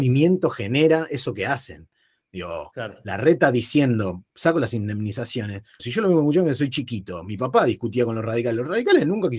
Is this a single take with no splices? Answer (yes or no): no